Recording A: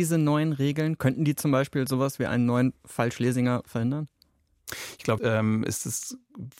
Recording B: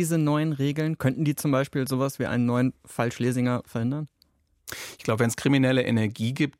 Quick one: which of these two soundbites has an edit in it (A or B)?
A